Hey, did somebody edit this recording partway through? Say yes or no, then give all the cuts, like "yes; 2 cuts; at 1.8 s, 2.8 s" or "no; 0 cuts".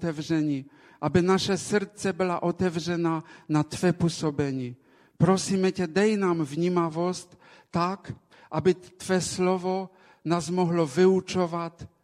no; 0 cuts